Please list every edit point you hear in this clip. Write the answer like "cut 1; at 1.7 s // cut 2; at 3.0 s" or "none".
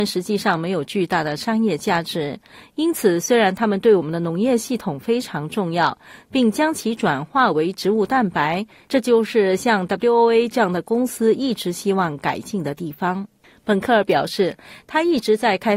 cut 1; at 6.2 s // cut 2; at 8.9 s